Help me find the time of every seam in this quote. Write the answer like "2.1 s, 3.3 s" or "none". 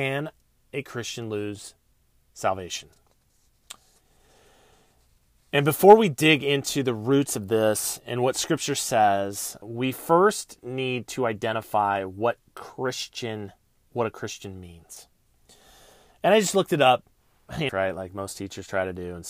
9.6 s, 17.7 s